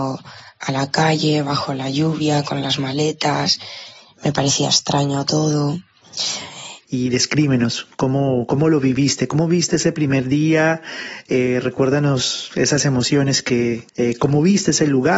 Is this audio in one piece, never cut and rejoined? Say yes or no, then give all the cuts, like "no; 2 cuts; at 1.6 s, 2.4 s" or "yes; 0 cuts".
no; 2 cuts; at 6.8 s, 13.9 s